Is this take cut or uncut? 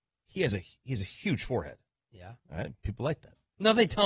uncut